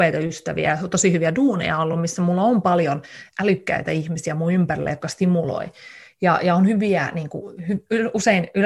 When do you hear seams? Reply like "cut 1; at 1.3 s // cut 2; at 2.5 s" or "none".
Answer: none